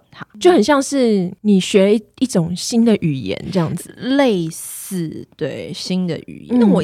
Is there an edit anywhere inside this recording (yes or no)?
no